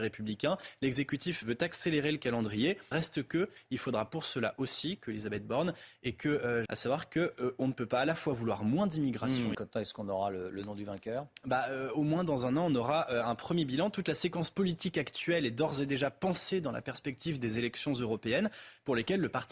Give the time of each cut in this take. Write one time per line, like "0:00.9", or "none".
0:02.9
0:06.7
0:09.5